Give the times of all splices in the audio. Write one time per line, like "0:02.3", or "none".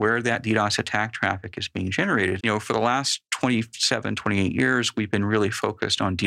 0:02.4